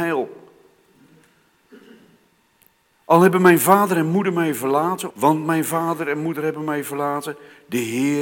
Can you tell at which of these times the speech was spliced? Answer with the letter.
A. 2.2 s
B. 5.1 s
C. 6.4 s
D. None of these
B